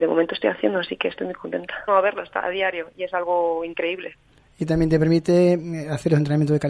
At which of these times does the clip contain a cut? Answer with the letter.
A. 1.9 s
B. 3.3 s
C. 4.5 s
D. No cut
A